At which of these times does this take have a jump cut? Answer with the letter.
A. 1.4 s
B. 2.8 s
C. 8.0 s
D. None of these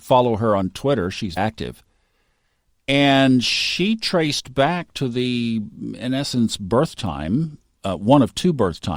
A